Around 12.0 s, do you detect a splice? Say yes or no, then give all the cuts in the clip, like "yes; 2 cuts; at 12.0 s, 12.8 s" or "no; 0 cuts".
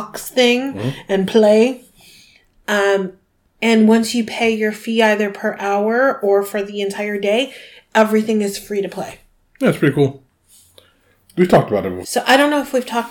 yes; 1 cut; at 12.0 s